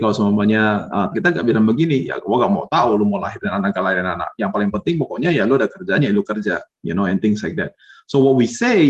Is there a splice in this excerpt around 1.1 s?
yes; 1 cut; at 1.1 s

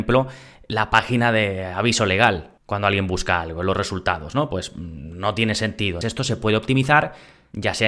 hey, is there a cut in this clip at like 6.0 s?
yes; 1 cut; at 6.0 s

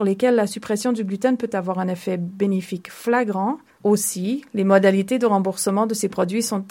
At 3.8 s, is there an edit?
yes; 1 cut; at 3.8 s

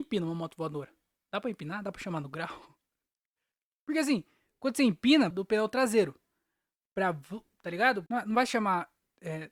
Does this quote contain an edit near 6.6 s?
no; 2 cuts; at 5.3 s, 8.1 s

